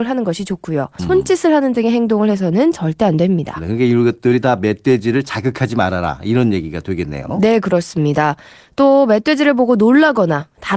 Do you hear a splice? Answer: yes; 1 cut; at 1.0 s

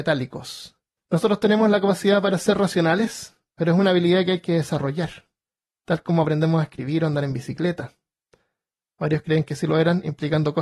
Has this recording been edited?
yes; 2 cuts; at 1.0 s, 8.8 s

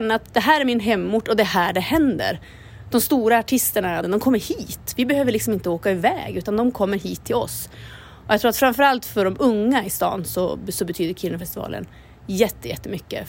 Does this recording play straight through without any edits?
no; 1 cut; at 4.0 s

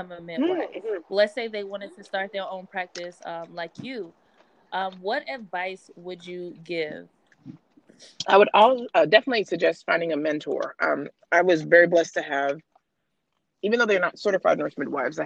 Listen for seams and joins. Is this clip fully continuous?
yes; 0 cuts

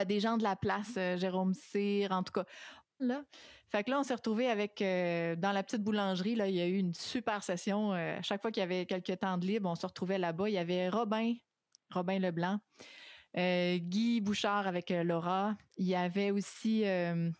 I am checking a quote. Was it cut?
yes; 1 cut; at 3.0 s

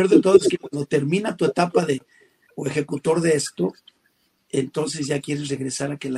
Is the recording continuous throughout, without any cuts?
no; 1 cut; at 2.4 s

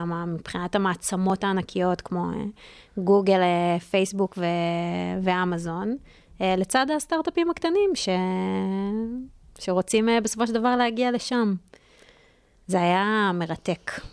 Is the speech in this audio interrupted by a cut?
no; 0 cuts

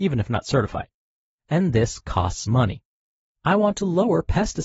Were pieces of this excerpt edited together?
no; 0 cuts

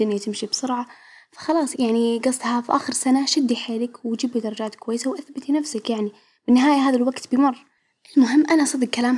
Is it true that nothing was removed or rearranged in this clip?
no; 1 cut; at 1.7 s

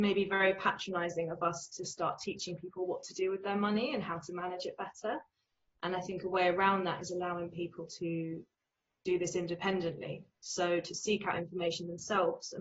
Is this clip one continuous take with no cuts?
yes; 0 cuts

